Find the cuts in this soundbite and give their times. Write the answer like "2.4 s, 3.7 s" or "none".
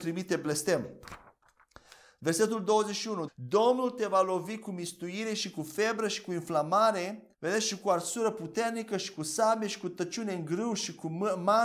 3.3 s, 7.3 s